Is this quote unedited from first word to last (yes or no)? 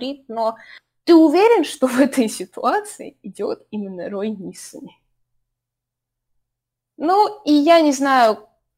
yes